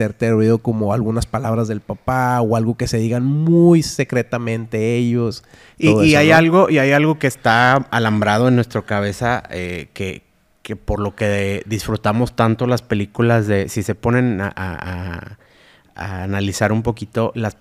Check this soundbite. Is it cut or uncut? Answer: uncut